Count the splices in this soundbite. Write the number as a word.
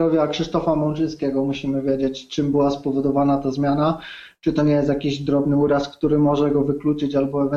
zero